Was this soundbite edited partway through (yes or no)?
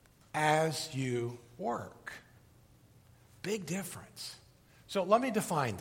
no